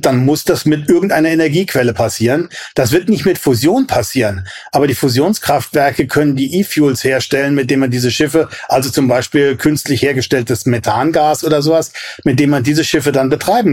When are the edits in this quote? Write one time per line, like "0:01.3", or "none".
none